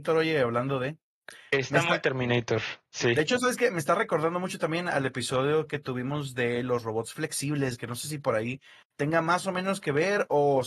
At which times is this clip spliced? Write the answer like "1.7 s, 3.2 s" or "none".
none

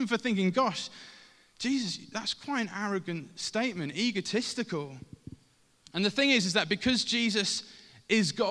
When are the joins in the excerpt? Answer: 5.8 s

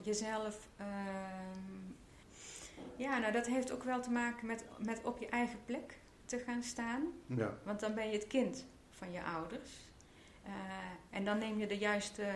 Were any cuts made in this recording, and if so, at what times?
10.4 s

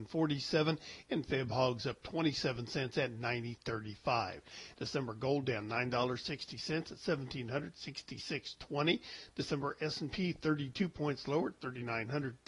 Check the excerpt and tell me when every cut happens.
4.7 s

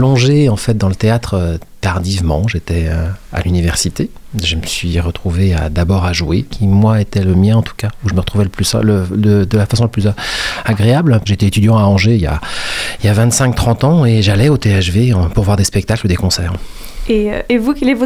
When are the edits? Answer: 6.5 s, 11.3 s

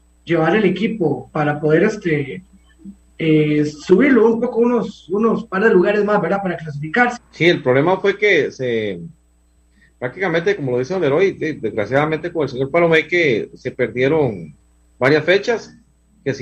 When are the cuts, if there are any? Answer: 7.2 s

